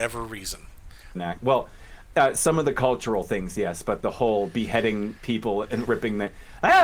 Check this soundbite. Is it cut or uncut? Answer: cut